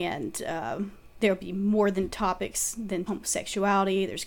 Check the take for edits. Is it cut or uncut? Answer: cut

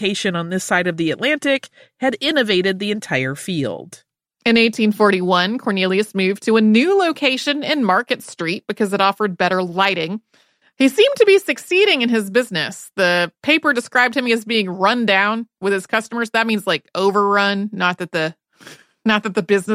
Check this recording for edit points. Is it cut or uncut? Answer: cut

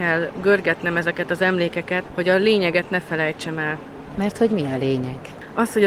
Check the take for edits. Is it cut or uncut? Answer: cut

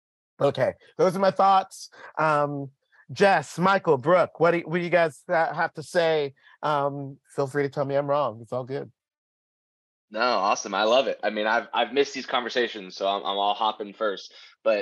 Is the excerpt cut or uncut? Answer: uncut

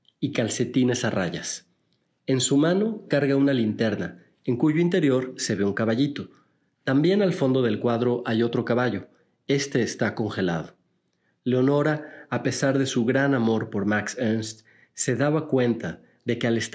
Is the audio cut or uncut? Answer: uncut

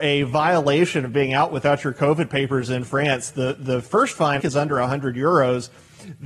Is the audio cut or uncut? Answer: cut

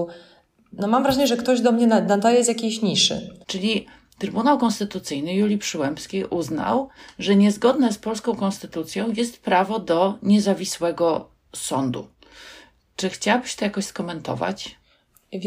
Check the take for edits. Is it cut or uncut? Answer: cut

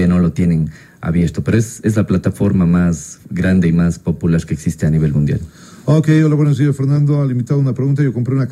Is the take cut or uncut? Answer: uncut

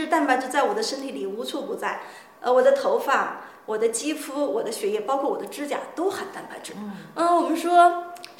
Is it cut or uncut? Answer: uncut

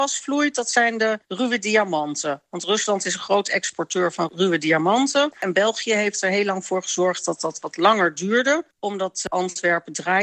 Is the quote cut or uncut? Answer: cut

